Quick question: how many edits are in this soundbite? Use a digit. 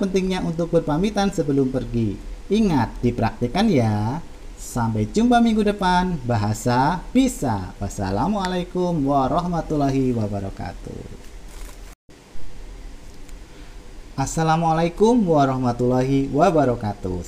0